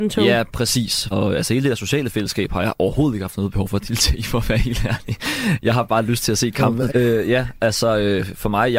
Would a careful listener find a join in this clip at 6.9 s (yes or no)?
yes